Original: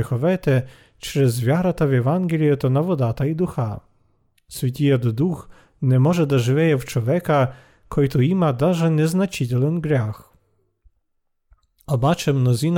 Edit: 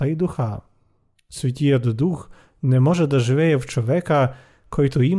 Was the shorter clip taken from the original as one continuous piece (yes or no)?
yes